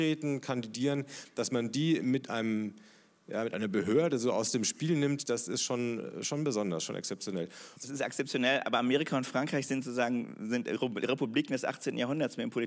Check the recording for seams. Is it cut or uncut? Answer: uncut